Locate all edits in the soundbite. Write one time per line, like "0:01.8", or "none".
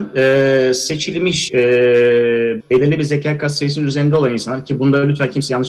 0:01.5
0:02.6